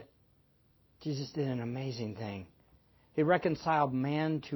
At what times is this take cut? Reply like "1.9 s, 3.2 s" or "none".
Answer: none